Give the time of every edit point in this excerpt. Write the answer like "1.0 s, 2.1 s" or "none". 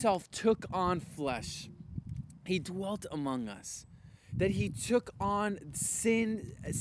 4.3 s

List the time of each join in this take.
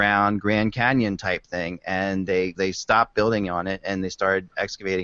2.6 s

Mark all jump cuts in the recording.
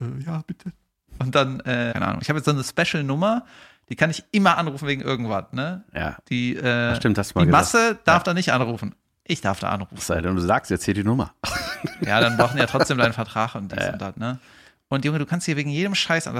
1.9 s

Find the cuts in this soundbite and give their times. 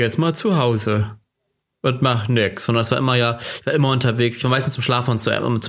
none

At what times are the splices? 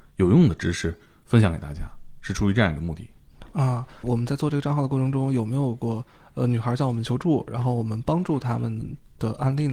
4.0 s

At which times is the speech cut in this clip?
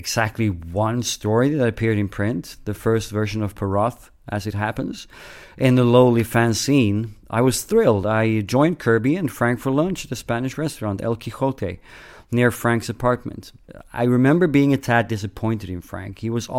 none

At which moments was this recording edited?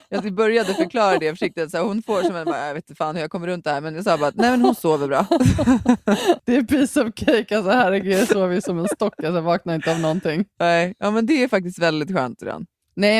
6.4 s

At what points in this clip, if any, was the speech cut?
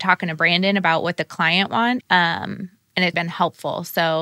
2.0 s, 3.1 s

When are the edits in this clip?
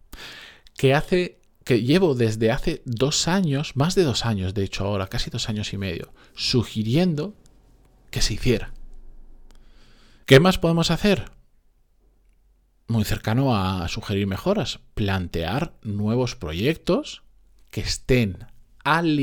10.2 s

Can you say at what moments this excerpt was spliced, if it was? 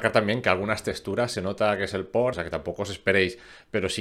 2.3 s

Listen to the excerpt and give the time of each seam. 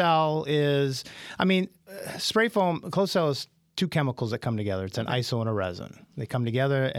none

